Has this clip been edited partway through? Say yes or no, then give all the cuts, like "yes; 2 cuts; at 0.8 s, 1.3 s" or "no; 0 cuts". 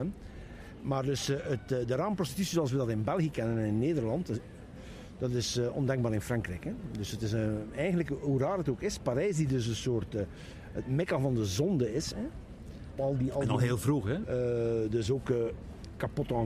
yes; 2 cuts; at 13.0 s, 14.2 s